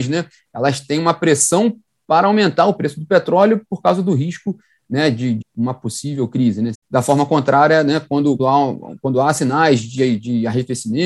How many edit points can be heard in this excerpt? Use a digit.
3